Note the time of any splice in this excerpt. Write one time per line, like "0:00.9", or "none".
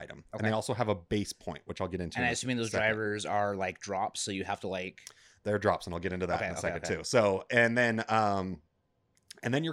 none